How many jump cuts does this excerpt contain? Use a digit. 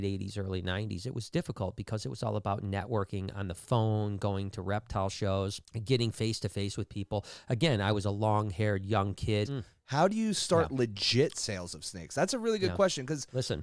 2